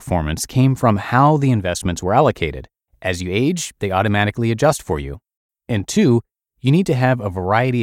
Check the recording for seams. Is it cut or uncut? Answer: cut